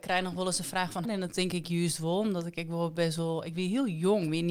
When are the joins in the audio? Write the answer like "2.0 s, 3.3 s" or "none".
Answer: 1.0 s